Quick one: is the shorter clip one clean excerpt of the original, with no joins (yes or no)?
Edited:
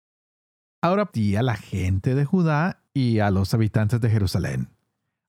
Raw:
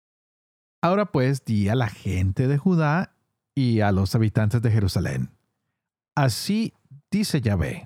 no